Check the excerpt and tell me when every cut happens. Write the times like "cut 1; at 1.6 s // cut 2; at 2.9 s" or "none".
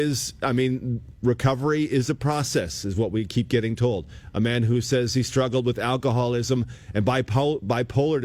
none